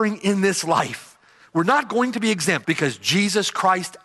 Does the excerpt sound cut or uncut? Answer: cut